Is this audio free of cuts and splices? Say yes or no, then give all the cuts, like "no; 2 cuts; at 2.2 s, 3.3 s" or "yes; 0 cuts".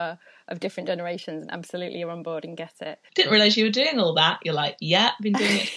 no; 1 cut; at 3.1 s